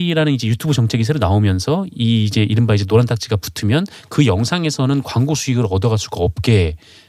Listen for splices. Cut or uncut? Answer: uncut